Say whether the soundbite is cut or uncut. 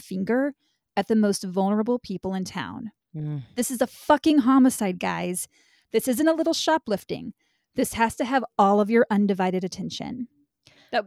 uncut